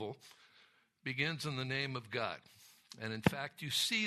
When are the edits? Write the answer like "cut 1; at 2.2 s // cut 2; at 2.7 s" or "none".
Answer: none